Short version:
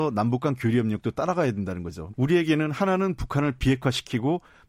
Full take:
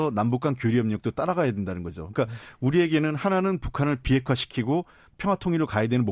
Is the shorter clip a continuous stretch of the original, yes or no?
no